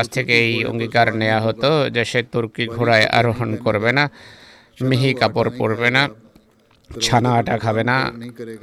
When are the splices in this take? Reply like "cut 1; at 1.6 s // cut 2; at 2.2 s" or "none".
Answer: none